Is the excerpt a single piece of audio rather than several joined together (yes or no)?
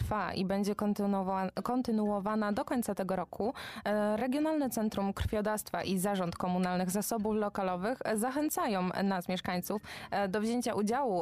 yes